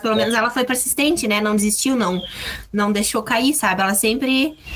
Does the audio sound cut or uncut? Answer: uncut